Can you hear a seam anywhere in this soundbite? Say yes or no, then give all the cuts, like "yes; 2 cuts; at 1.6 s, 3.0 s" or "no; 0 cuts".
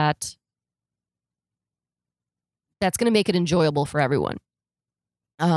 no; 0 cuts